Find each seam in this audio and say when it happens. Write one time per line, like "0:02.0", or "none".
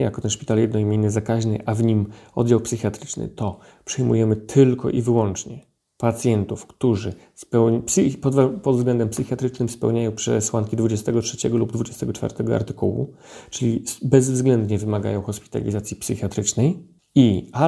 none